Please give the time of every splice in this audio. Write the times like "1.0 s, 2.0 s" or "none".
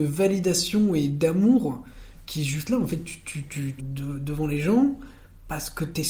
3.8 s